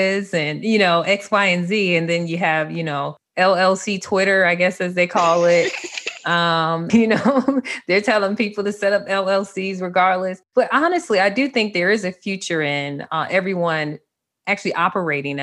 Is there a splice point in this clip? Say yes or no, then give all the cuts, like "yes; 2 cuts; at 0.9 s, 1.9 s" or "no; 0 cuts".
yes; 1 cut; at 6.9 s